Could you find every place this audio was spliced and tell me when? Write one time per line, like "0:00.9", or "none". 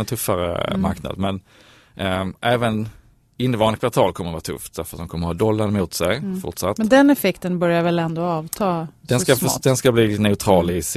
none